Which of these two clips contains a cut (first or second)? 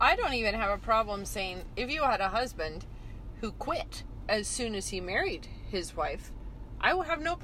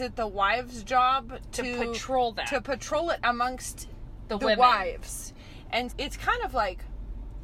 second